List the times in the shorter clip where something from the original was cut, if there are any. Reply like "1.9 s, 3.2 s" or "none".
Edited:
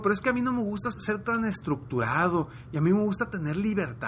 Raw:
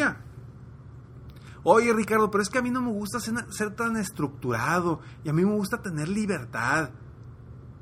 0.9 s